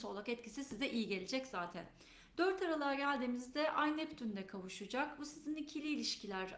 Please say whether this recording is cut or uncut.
uncut